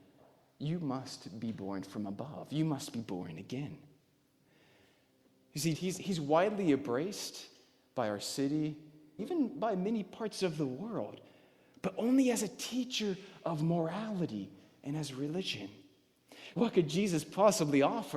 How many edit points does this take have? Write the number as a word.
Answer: three